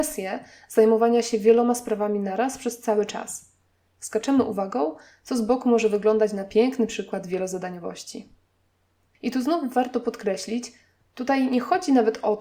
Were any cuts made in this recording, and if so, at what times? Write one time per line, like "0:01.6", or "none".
0:03.9